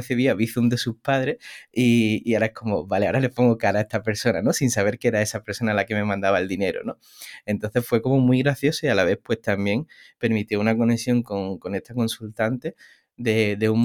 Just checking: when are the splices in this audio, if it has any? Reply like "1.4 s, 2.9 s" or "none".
none